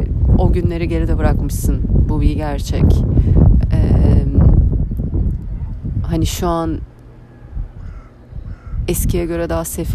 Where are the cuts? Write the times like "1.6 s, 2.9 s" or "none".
none